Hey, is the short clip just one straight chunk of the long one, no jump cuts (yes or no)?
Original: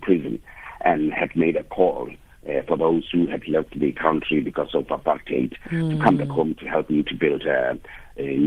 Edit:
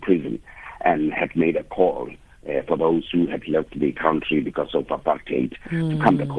yes